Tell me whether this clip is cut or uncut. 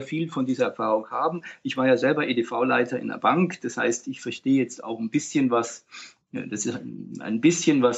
uncut